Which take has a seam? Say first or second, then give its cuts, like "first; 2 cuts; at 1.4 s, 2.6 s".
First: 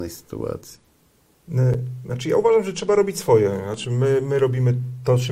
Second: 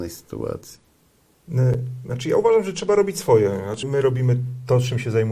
second; 1 cut; at 3.8 s